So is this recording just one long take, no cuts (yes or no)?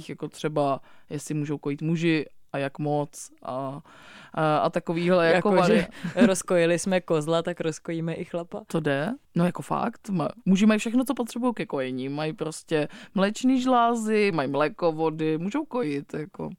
no